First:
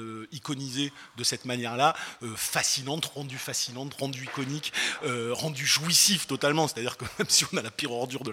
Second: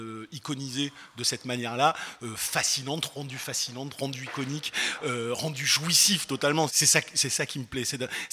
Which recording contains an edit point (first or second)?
second